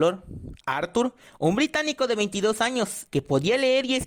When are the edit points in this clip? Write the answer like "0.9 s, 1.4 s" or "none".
3.1 s